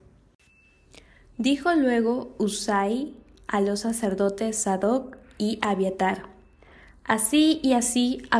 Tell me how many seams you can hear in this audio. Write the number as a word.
zero